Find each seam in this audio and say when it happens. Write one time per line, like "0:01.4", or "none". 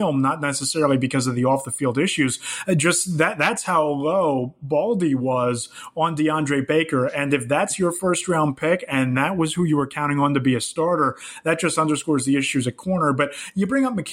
none